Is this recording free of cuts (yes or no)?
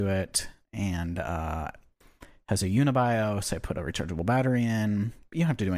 yes